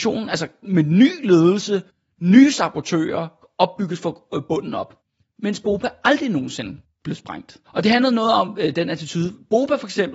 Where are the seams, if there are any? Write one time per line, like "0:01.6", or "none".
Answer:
0:07.6